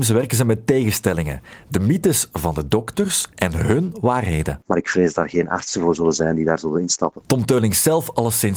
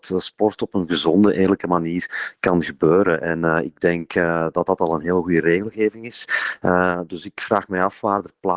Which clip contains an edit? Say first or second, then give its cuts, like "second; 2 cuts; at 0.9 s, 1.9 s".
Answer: first; 1 cut; at 4.6 s